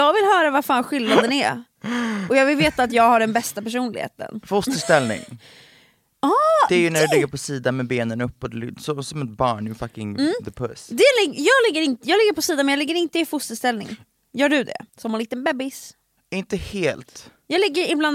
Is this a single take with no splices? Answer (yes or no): no